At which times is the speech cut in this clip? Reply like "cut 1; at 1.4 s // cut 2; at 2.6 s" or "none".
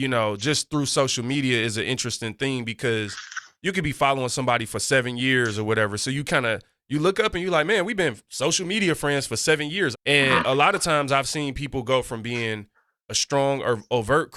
cut 1; at 9.9 s